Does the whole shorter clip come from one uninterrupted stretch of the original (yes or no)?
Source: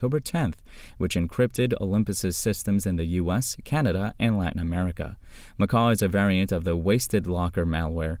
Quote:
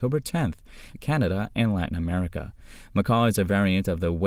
no